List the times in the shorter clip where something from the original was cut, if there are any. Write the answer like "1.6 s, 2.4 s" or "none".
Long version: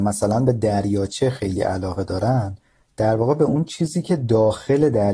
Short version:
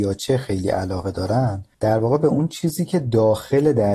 1.7 s

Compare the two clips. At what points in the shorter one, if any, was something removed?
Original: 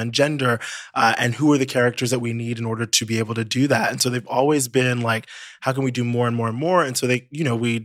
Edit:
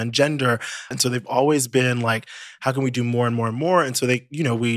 0.9 s

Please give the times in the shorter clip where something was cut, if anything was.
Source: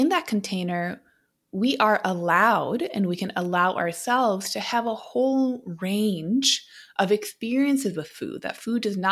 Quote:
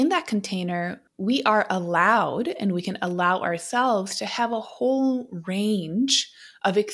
1.1 s

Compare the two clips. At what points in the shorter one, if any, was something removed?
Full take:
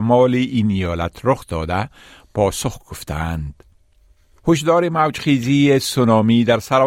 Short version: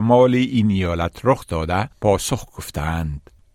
1.9 s

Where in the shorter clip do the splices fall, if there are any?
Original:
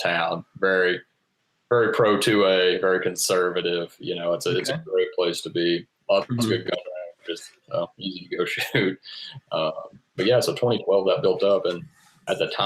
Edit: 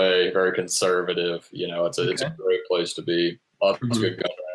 none

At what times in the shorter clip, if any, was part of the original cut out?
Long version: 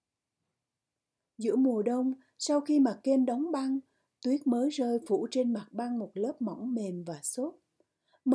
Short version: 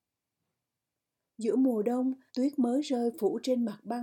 2.3 s

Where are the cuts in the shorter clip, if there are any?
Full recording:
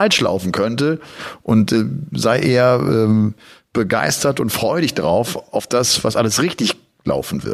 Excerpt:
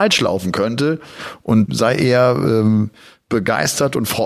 1.7 s

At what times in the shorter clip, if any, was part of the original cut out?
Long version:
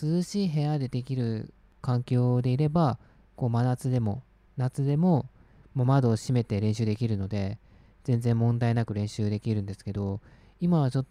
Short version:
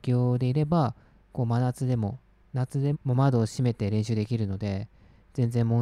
2.9 s

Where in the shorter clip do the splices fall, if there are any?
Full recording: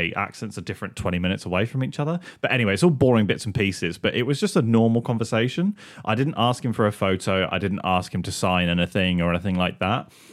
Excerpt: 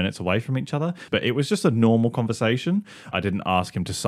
1.1 s, 3.1 s

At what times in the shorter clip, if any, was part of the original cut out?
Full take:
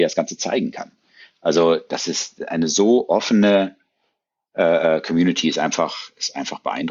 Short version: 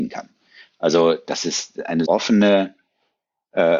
2.1 s

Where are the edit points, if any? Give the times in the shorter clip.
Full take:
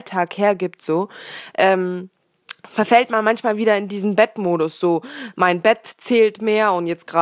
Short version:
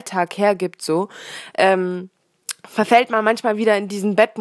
none

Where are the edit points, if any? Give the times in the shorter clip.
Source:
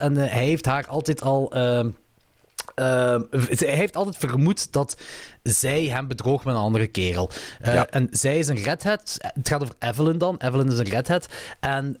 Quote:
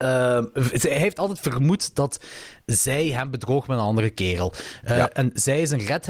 none

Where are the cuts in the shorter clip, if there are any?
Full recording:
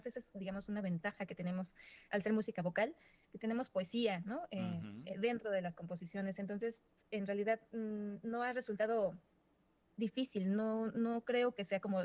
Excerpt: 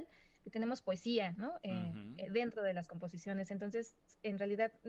none

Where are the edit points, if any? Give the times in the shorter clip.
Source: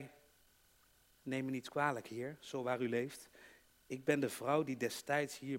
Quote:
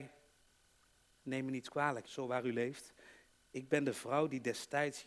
2.0 s

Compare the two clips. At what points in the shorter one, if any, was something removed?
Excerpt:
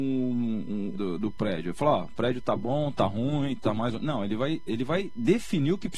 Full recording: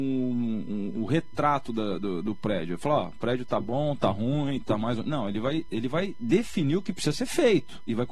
0.9 s

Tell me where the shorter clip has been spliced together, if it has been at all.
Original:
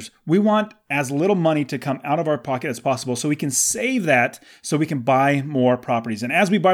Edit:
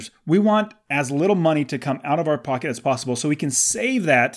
none

